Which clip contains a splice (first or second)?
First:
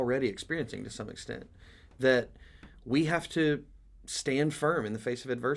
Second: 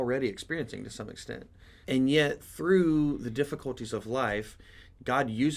second